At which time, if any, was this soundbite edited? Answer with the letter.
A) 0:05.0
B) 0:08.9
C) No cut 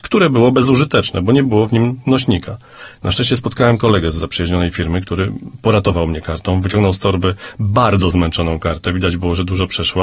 C